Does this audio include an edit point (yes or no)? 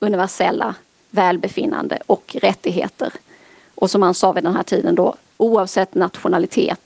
no